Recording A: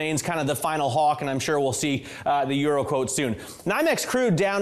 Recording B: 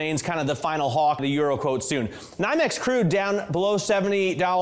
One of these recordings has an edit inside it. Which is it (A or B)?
B